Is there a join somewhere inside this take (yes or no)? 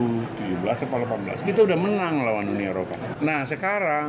yes